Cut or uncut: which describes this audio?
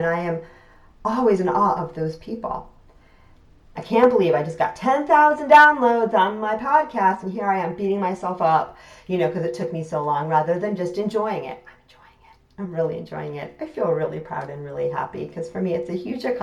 cut